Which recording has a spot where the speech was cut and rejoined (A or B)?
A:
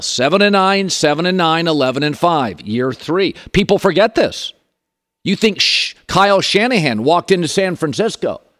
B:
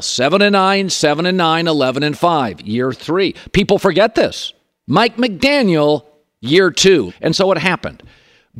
B